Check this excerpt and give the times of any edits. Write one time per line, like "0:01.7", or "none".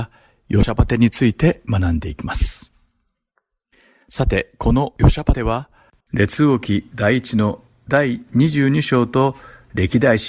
none

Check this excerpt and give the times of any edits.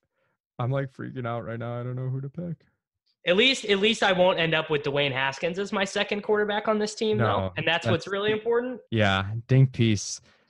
0:08.9

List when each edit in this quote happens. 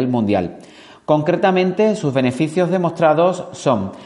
none

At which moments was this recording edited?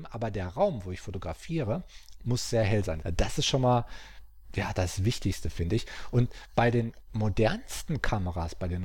0:03.0

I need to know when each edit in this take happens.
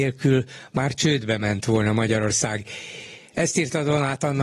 none

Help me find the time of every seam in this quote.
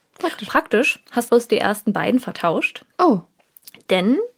0:01.3

